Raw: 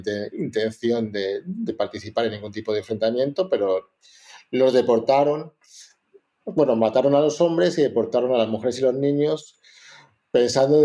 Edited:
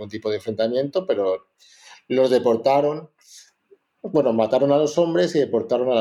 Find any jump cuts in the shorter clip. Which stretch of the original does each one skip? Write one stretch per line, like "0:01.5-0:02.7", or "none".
none